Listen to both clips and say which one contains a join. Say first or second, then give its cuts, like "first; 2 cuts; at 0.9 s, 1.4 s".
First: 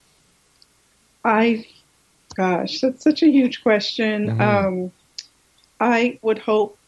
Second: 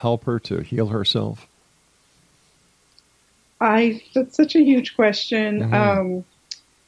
second; 1 cut; at 4.1 s